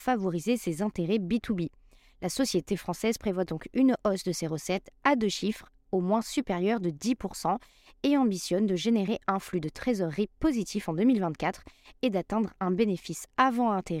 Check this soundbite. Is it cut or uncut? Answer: uncut